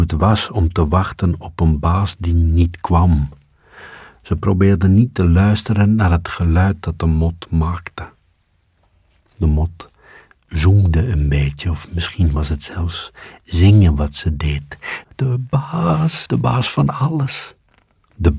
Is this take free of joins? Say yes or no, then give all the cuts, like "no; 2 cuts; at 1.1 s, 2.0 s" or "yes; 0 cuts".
no; 2 cuts; at 15.0 s, 16.3 s